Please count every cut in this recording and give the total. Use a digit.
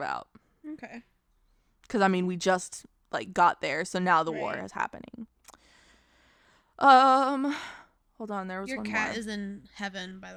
0